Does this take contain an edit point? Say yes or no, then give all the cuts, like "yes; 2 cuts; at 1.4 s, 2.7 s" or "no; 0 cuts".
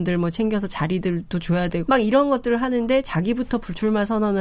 yes; 1 cut; at 1.9 s